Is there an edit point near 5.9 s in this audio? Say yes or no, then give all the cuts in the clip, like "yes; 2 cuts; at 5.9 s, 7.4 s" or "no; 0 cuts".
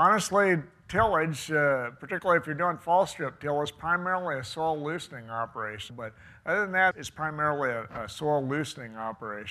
yes; 2 cuts; at 5.9 s, 6.9 s